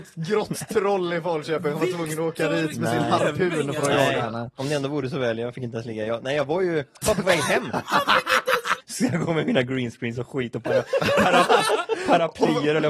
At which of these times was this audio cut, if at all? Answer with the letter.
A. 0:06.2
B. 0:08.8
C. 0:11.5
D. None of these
B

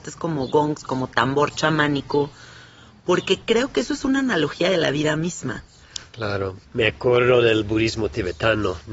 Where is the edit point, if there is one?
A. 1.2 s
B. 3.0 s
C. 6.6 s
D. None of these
C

